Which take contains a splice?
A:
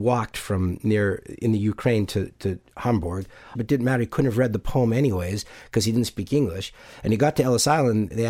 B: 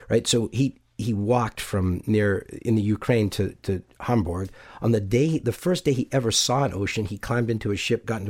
A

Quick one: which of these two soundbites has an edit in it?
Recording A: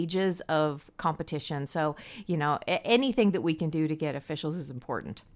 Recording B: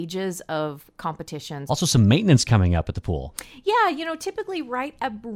B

